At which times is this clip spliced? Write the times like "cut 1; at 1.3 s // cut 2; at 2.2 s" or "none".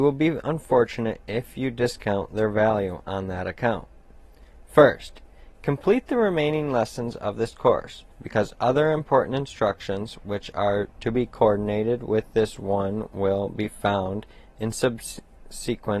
cut 1; at 8.1 s